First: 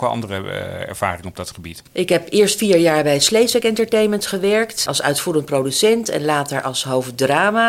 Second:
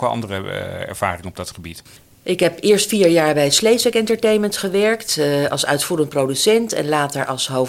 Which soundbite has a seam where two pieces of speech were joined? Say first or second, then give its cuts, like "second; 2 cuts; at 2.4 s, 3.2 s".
first; 2 cuts; at 1.9 s, 4.9 s